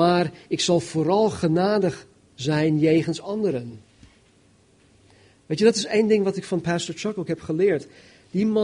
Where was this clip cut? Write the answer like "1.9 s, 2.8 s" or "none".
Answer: none